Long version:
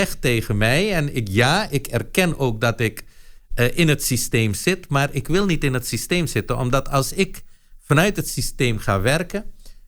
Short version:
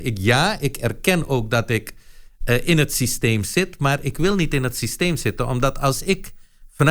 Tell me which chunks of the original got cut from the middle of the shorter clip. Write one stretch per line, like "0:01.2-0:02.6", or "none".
none